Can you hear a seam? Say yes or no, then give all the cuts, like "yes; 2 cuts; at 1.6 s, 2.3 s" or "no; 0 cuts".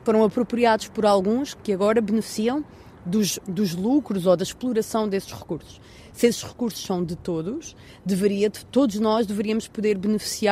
yes; 1 cut; at 3.4 s